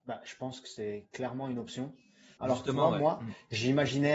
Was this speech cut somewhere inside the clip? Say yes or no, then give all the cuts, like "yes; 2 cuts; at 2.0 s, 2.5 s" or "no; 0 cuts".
yes; 1 cut; at 2.4 s